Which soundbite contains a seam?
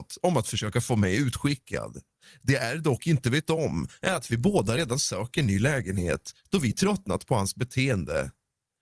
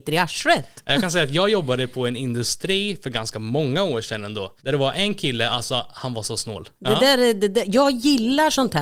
second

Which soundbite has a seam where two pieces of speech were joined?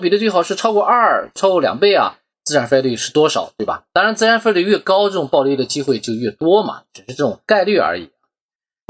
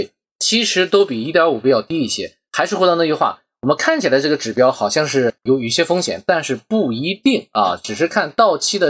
first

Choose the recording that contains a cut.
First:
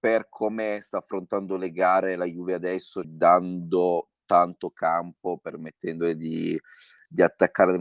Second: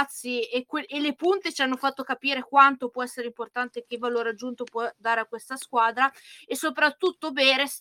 first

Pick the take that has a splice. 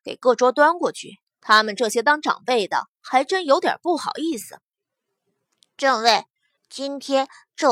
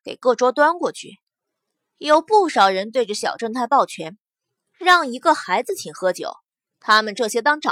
first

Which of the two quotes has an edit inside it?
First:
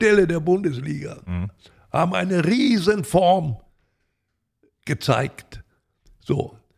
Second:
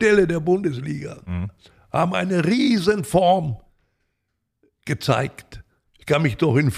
second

